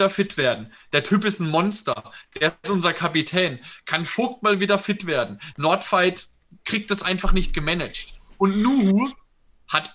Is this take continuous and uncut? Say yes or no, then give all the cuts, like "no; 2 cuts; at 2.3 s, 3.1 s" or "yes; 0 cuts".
no; 1 cut; at 5.5 s